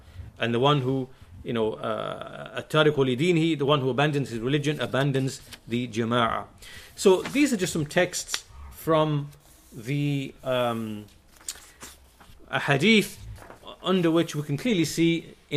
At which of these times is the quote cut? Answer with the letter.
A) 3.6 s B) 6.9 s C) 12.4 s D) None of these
C